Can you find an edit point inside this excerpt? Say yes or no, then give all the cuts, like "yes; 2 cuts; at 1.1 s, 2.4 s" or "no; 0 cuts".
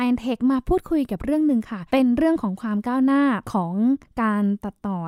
yes; 2 cuts; at 1.9 s, 3.4 s